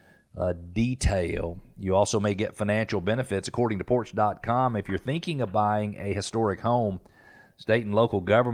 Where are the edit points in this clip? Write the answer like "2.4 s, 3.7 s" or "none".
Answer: none

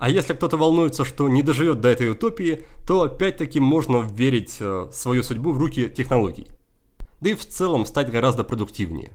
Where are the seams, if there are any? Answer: 7.0 s

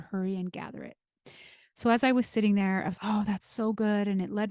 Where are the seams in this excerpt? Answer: 3.0 s

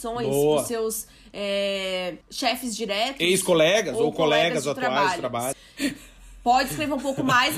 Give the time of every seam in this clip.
2.2 s, 5.5 s

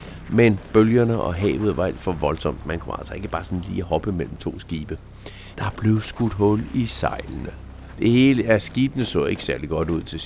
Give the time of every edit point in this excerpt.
5.5 s, 7.9 s

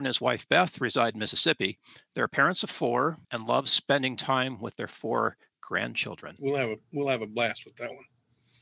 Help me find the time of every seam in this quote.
3.2 s, 6.4 s

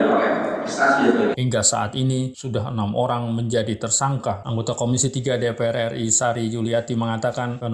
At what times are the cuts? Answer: 1.3 s, 4.4 s

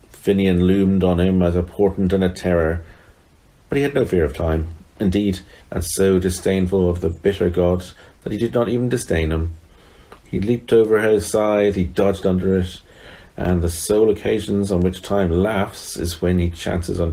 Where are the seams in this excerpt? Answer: 5.6 s

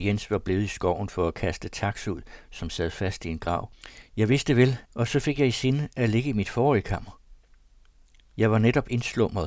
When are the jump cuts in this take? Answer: 4.8 s

